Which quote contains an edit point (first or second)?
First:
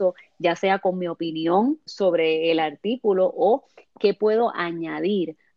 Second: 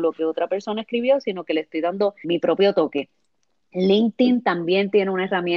second